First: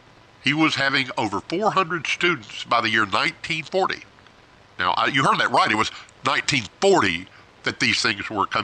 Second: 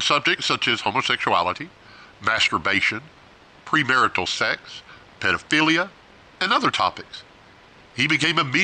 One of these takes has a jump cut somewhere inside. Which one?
second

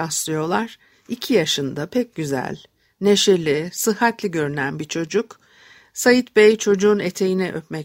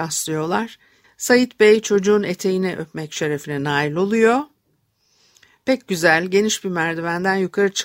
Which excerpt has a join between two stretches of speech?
second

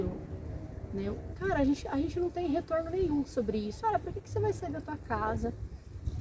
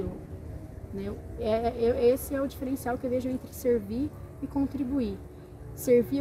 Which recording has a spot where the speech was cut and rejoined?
first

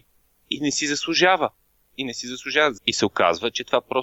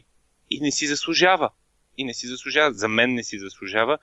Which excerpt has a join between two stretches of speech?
first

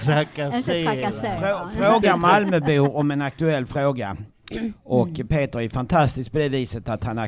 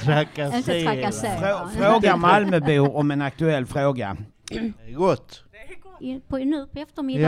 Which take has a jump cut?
second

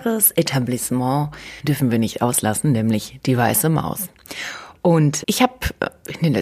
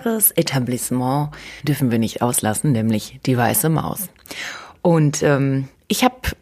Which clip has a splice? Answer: first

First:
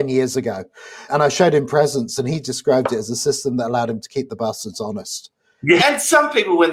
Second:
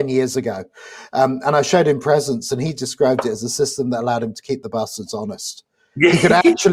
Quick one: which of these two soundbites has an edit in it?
first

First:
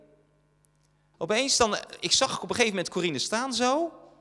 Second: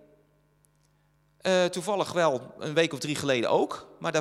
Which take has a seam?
first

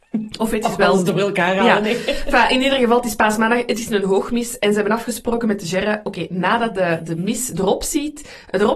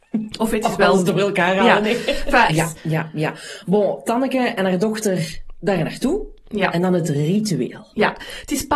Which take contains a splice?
second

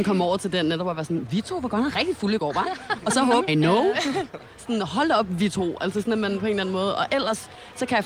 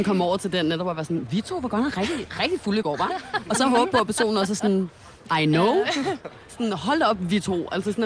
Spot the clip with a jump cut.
first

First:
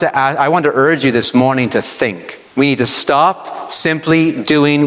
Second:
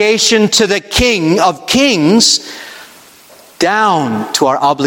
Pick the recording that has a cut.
first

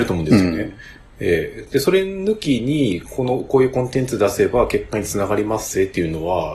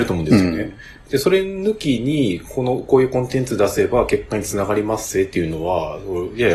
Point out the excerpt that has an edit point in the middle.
second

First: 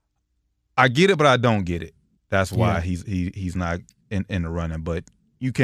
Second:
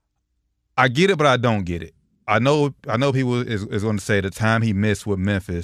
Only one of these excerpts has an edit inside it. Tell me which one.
first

